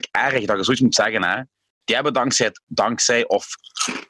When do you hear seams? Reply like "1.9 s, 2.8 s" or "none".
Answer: 2.6 s